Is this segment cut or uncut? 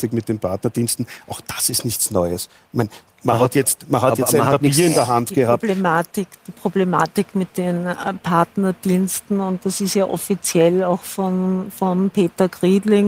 uncut